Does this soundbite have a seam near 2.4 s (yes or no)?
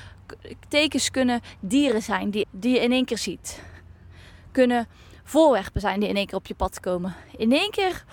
yes